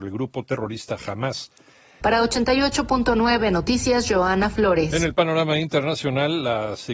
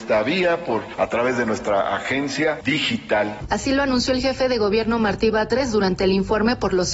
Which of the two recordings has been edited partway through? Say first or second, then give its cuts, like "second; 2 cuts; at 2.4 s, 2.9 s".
first; 1 cut; at 2.0 s